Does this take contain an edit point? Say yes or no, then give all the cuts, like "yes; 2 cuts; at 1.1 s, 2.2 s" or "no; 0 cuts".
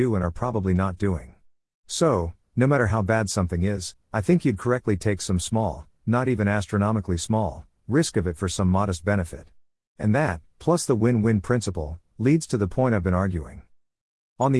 no; 0 cuts